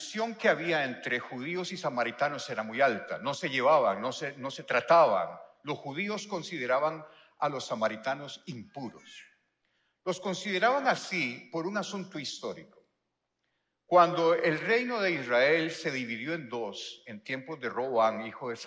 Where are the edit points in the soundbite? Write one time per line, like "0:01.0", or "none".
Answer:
none